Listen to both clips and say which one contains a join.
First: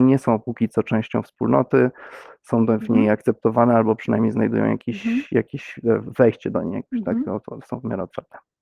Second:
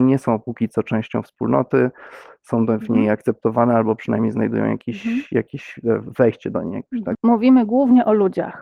second; 1 cut; at 7.1 s

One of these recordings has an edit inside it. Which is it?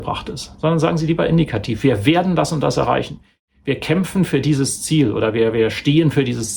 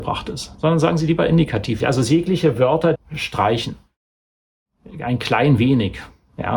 second; 2 cuts; at 1.8 s, 2.9 s

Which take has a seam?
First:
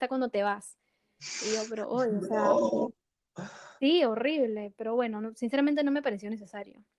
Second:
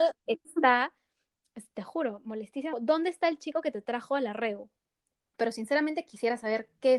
second; 2 cuts; at 2.7 s, 5.3 s

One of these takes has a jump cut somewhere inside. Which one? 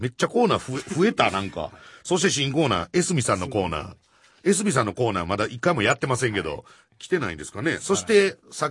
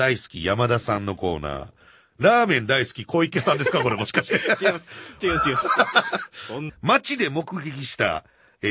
second; 2 cuts; at 5.2 s, 6.7 s

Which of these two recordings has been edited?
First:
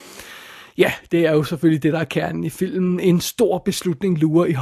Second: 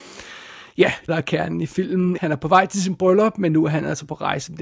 second; 2 cuts; at 1.1 s, 2.2 s

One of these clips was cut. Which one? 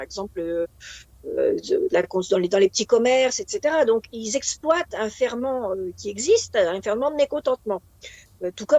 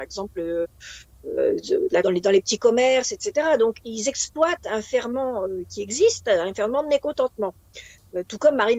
second; 1 cut; at 2.0 s

